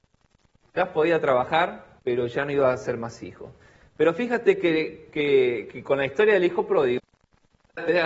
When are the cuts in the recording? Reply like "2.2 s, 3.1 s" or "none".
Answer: 2.0 s

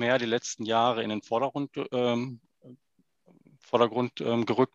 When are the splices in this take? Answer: none

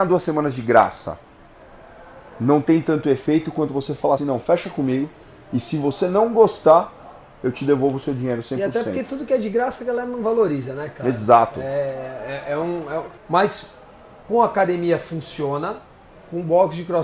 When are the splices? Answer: 4.2 s, 13.2 s

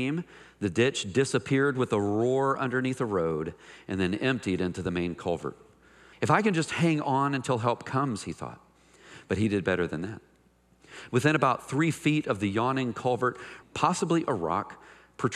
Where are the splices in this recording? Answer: 6.1 s, 11.1 s, 13.6 s

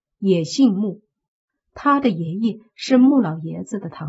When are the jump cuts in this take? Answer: none

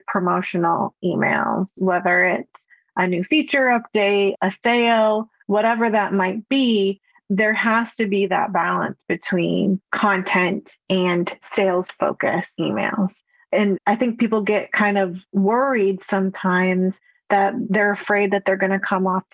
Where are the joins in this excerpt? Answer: 4.3 s

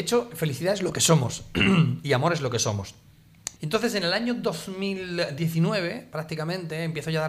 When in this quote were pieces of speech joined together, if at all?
3.6 s

